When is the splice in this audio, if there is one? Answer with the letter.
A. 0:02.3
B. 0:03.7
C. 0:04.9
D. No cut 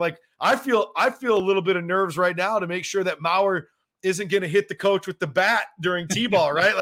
D